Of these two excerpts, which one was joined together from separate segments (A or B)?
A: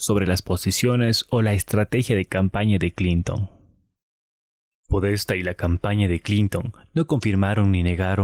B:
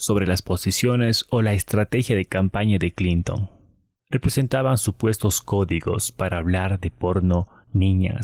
B